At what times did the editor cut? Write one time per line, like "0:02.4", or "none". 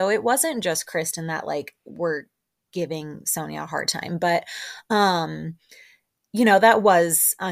none